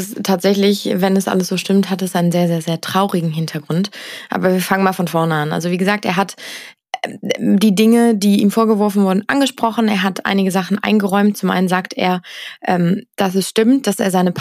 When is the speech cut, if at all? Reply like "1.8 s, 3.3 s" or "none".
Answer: none